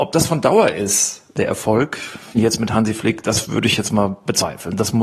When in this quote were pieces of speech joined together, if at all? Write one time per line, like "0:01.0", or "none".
none